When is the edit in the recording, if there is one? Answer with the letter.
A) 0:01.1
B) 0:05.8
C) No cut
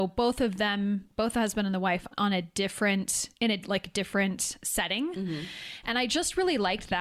B